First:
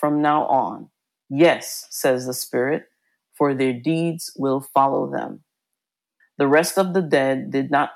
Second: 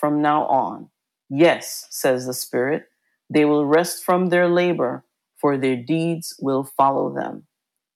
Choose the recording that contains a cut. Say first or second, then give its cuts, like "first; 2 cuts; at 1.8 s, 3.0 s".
first; 2 cuts; at 3.2 s, 6.2 s